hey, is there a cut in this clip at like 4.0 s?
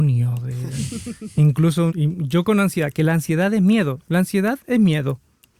no; 1 cut; at 1.9 s

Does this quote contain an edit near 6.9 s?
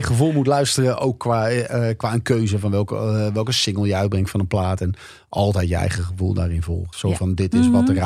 yes; 1 cut; at 6.9 s

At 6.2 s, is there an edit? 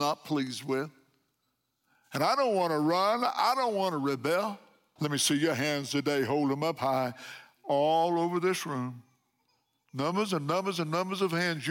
no; 1 cut; at 5.0 s

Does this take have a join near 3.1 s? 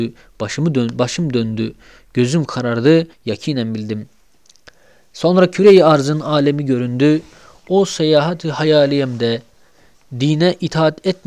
yes; 1 cut; at 3.1 s

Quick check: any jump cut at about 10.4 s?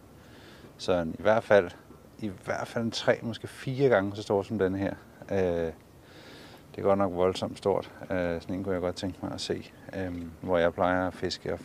yes; 1 cut; at 10.4 s

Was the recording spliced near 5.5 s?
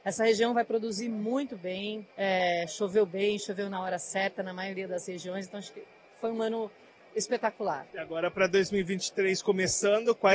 no; 2 cuts; at 2.1 s, 7.9 s

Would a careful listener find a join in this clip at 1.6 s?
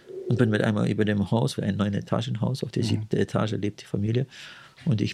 yes; 1 cut; at 1.6 s

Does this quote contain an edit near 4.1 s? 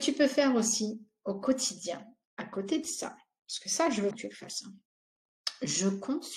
yes; 1 cut; at 4.1 s

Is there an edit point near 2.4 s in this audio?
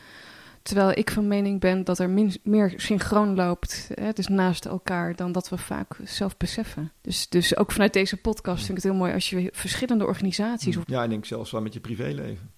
no; 2 cuts; at 7.0 s, 10.8 s

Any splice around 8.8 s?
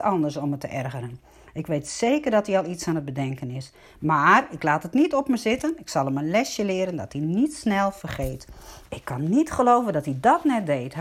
yes; 1 cut; at 8.8 s

